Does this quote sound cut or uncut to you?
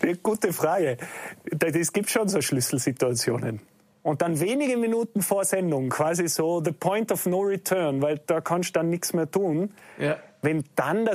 cut